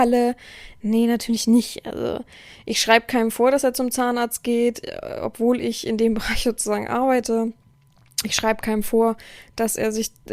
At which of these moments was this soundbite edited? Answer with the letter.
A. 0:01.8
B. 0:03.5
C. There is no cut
C